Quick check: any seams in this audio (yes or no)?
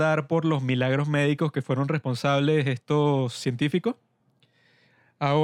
no